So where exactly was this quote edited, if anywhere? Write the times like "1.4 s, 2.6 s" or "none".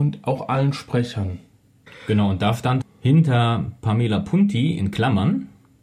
2.8 s